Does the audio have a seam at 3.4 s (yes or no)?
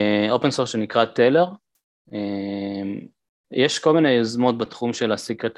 yes